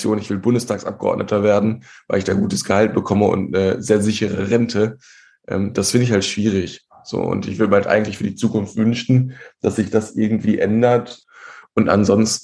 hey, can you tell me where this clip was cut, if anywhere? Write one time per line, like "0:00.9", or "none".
none